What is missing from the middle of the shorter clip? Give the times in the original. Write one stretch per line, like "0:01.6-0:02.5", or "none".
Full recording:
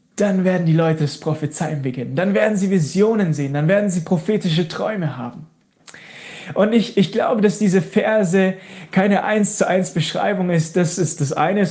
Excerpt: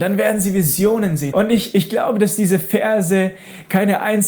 0:03.5-0:06.5